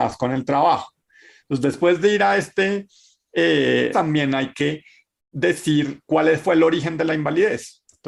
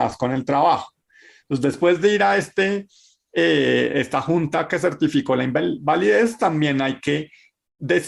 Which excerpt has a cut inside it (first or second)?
first